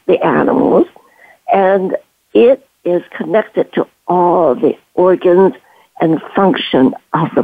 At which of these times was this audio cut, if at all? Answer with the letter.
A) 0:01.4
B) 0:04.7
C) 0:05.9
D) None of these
D